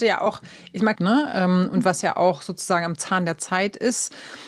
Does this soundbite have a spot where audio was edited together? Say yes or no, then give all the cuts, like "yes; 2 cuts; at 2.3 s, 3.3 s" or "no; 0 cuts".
yes; 1 cut; at 1.0 s